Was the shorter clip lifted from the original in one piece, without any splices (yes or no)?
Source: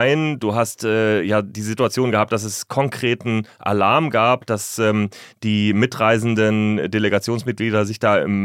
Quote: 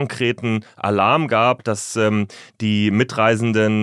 yes